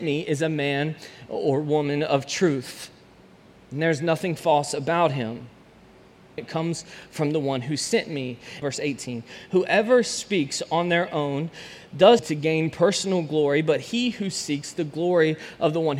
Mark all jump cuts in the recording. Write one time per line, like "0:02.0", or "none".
0:06.4
0:08.6
0:12.2

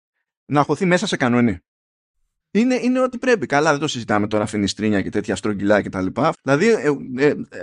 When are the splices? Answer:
0:02.4
0:06.3

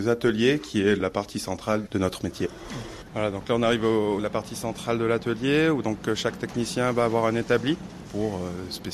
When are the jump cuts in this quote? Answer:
0:03.1
0:04.2

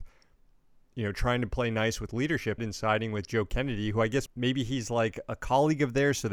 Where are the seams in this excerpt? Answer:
0:02.6
0:04.3

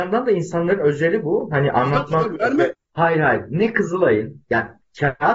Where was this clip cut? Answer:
0:02.7

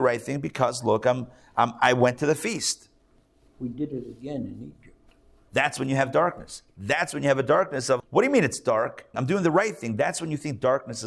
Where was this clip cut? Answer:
0:05.5
0:08.0
0:09.1

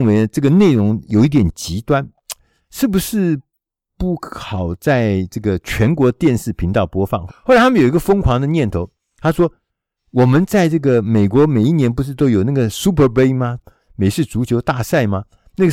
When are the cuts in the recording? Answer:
0:07.3
0:13.6

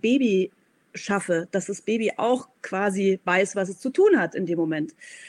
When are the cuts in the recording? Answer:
none

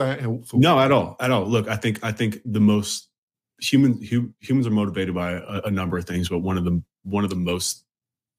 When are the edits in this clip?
none

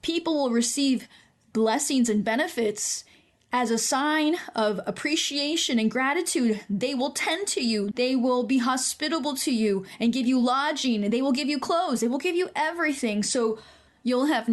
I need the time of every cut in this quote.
0:07.9

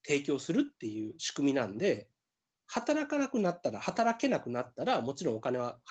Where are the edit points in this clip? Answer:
0:02.5

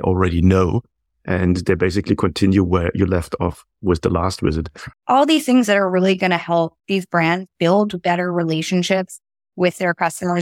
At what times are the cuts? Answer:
0:04.9
0:06.8

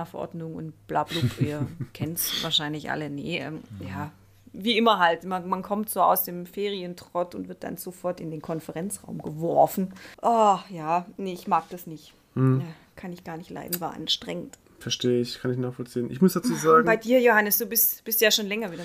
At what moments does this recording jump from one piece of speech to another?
0:10.1

